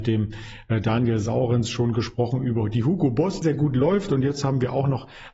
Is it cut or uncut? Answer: cut